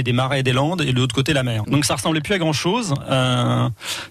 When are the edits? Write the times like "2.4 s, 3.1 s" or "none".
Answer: 1.6 s